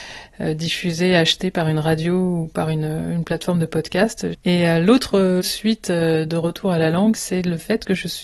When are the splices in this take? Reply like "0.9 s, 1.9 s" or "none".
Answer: 4.3 s, 7.2 s